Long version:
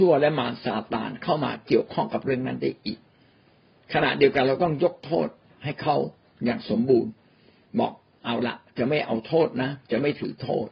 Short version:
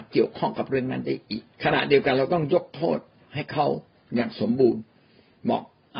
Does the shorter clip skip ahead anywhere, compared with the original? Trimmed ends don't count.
yes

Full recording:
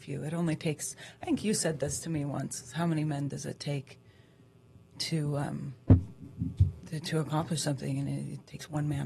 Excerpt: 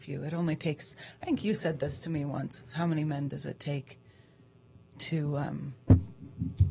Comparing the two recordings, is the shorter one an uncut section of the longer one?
yes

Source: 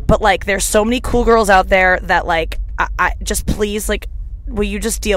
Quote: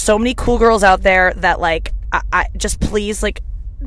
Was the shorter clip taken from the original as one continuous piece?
yes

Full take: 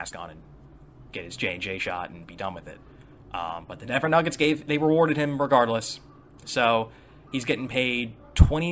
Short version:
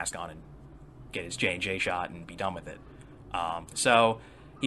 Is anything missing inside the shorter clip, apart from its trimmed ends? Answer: yes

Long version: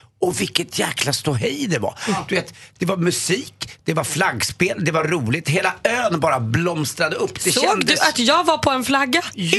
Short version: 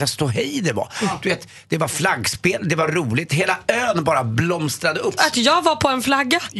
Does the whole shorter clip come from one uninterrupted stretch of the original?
no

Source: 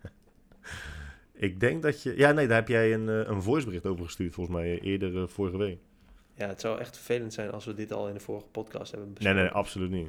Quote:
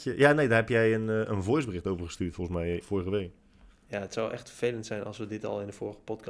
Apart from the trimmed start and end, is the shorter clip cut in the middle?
yes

